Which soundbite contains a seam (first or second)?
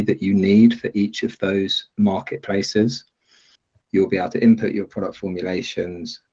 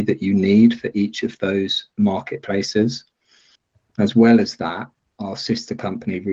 first